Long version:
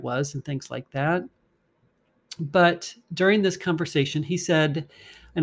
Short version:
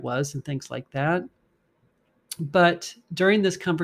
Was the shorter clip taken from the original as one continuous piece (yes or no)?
yes